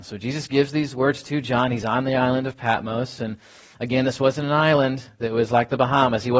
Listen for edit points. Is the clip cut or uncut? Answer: uncut